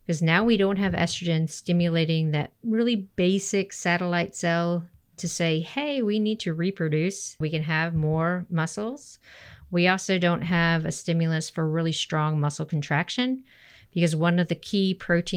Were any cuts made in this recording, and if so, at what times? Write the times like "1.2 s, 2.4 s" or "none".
7.4 s